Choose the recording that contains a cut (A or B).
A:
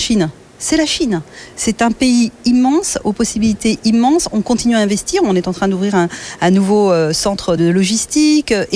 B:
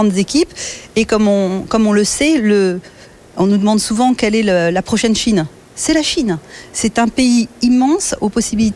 A